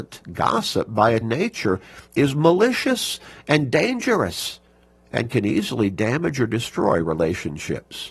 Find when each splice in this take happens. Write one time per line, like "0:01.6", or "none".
0:01.2